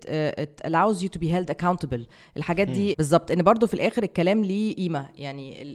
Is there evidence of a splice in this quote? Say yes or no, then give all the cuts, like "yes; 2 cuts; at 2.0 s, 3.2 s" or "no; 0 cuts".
yes; 1 cut; at 2.9 s